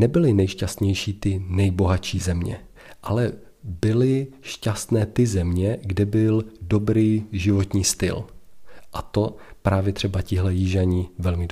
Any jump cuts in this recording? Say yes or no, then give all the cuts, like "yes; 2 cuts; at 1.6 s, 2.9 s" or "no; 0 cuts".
no; 0 cuts